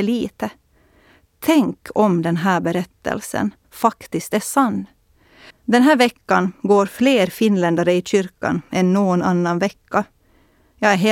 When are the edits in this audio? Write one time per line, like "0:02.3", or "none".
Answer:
0:03.6
0:05.5